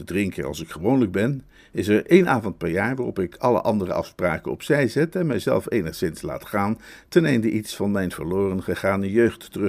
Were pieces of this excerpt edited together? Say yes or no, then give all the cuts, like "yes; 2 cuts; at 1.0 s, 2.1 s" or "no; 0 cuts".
no; 0 cuts